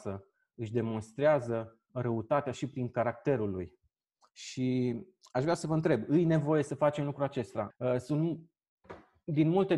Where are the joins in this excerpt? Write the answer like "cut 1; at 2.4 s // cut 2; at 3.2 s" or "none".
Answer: cut 1; at 1.9 s // cut 2; at 7.7 s